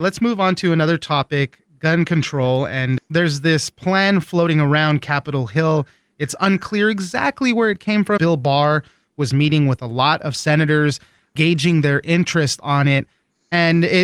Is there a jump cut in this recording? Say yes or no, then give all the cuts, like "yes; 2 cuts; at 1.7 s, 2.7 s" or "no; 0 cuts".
yes; 1 cut; at 8.2 s